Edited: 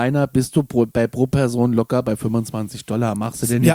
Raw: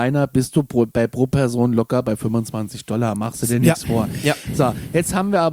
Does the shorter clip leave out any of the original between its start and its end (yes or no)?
no